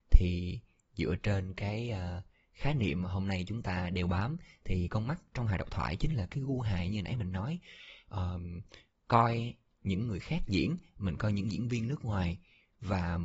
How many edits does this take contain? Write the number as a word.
one